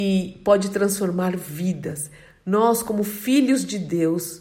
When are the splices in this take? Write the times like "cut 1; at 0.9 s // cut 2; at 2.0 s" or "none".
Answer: none